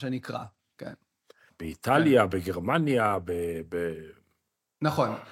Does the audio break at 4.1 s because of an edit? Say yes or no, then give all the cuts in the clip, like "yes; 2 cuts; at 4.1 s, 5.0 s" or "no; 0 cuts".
no; 1 cut; at 1.5 s